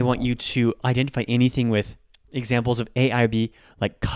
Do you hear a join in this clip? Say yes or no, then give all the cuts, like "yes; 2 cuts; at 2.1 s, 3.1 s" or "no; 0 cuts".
yes; 1 cut; at 2.3 s